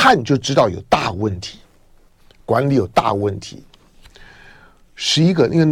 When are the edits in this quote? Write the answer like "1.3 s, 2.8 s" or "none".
none